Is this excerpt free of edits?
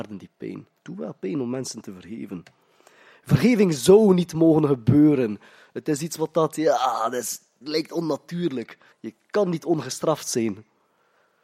no; 2 cuts; at 7.6 s, 8.9 s

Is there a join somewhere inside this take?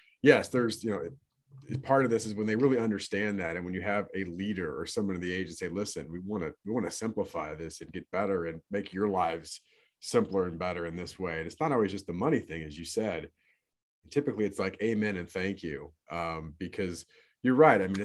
no; 0 cuts

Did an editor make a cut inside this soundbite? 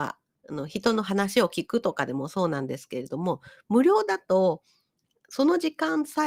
no; 0 cuts

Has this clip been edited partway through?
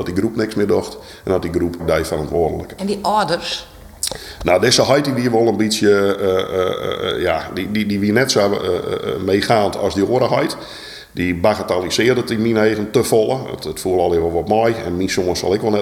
yes; 1 cut; at 1.8 s

